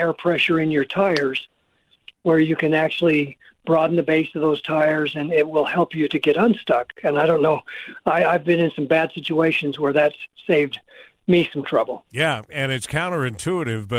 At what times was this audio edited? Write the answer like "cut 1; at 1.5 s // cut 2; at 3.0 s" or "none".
none